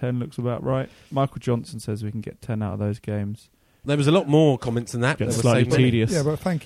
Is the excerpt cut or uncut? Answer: cut